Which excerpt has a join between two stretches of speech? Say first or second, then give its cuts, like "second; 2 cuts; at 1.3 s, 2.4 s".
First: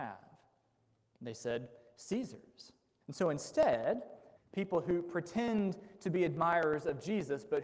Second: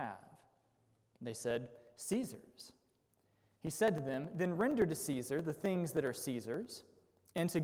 first; 2 cuts; at 3.0 s, 4.4 s